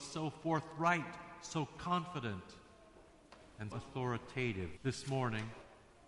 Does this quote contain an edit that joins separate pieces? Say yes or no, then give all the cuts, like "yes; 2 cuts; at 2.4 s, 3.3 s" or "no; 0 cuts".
yes; 2 cuts; at 3.7 s, 4.8 s